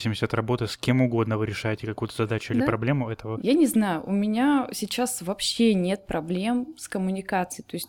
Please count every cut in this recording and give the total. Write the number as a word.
one